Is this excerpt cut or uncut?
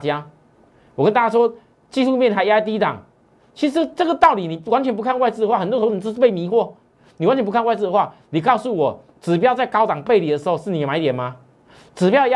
uncut